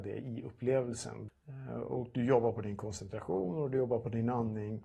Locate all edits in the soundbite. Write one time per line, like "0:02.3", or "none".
0:01.3